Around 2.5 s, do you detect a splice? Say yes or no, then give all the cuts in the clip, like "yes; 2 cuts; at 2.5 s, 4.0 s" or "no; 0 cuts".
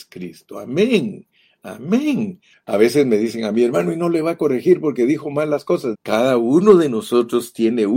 yes; 2 cuts; at 2.5 s, 5.9 s